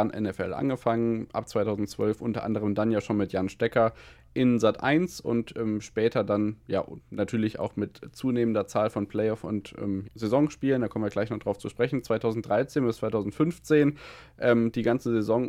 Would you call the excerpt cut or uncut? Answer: cut